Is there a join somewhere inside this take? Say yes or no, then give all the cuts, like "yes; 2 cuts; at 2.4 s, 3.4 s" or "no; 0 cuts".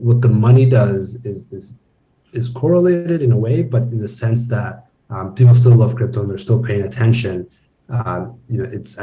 no; 0 cuts